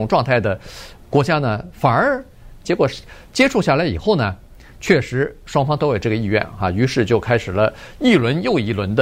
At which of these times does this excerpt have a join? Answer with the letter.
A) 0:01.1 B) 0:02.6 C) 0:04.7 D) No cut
B